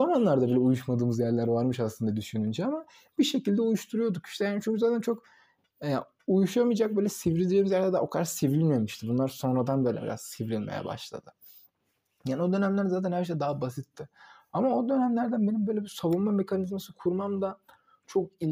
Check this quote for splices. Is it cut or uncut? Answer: uncut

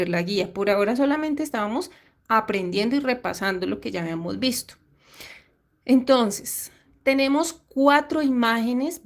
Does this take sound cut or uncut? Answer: uncut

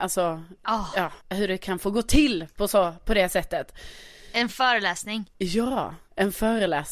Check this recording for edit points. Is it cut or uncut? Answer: cut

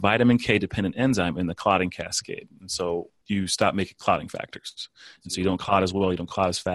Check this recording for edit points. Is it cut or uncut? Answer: cut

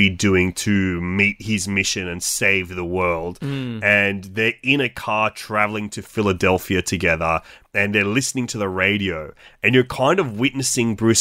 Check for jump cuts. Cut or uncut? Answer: uncut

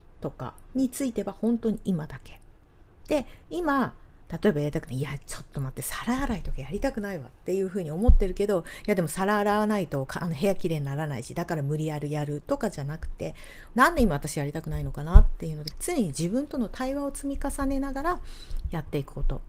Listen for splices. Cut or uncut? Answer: cut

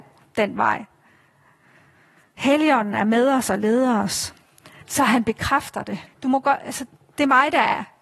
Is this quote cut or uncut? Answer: cut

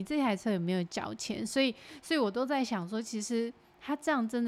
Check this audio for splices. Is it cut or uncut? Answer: uncut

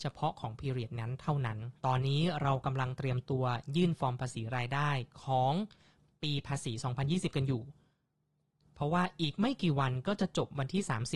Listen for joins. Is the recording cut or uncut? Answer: cut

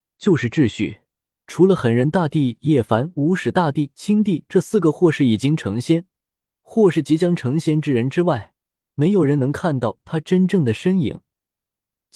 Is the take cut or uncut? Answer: uncut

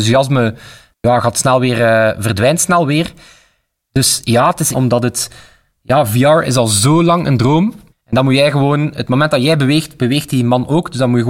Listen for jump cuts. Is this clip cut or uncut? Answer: cut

